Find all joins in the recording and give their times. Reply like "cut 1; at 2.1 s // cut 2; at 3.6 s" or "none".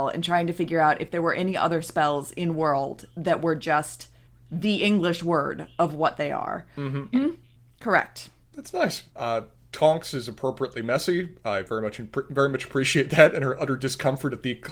cut 1; at 7.1 s // cut 2; at 9.1 s